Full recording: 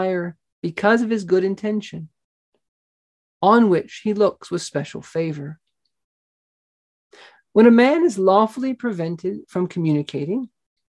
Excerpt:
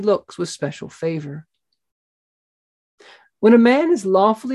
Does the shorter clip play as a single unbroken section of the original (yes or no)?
yes